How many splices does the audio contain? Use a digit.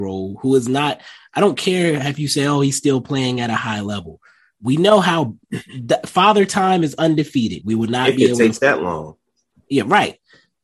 1